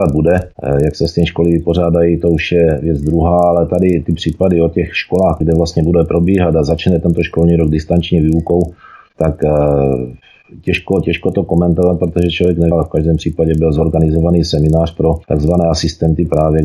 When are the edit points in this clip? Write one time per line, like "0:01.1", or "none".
0:05.4
0:12.7
0:15.2